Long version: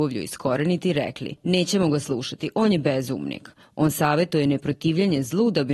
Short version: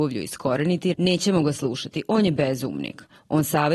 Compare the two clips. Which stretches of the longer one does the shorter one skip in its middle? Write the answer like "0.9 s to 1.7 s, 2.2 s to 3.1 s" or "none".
0.9 s to 1.4 s